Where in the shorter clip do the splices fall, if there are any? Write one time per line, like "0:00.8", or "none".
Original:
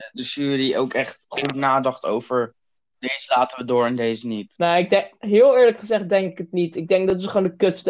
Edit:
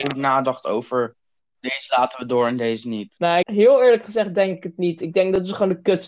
0:03.4